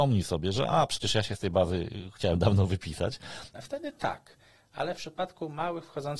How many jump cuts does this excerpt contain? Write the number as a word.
one